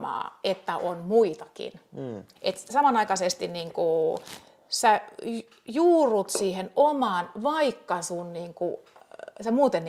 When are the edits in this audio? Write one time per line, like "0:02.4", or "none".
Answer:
0:02.4